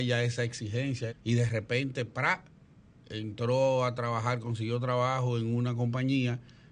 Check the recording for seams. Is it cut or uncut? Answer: cut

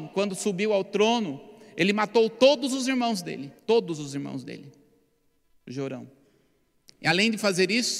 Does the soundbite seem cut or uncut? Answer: cut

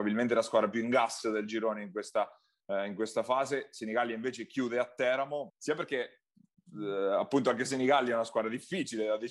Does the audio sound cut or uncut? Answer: cut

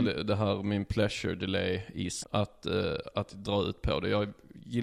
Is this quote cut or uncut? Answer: cut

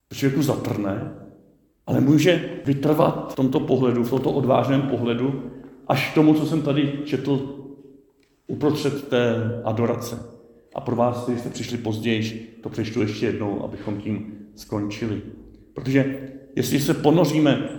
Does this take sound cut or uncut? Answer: uncut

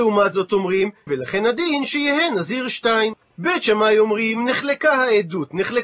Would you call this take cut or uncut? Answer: cut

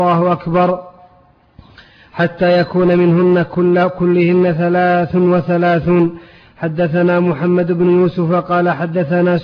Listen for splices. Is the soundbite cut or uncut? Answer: uncut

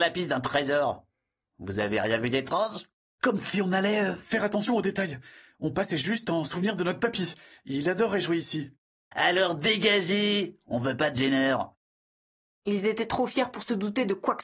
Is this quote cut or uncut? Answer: uncut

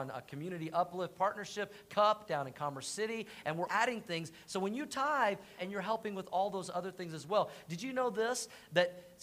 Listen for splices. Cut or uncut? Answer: cut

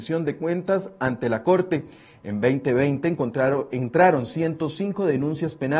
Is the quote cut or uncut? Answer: uncut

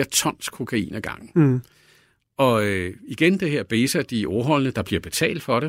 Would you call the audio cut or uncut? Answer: uncut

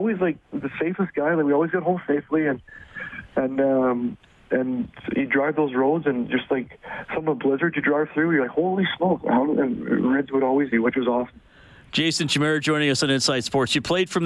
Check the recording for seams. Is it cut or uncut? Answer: cut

